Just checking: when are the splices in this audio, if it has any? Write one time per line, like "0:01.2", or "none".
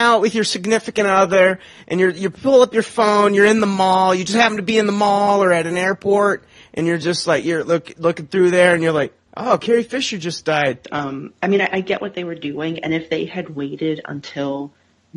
0:10.8